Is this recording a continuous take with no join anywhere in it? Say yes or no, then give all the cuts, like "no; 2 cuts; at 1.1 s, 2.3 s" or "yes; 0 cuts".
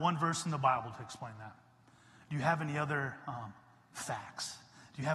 yes; 0 cuts